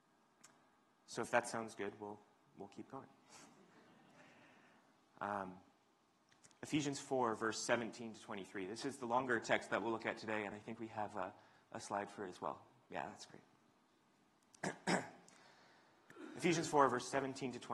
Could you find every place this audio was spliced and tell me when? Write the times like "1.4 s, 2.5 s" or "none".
none